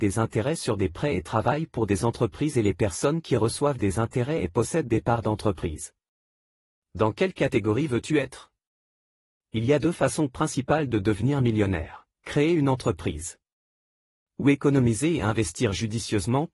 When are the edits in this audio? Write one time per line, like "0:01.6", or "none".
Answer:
0:12.1